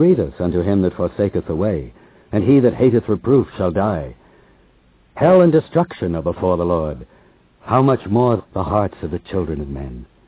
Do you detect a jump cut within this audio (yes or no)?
yes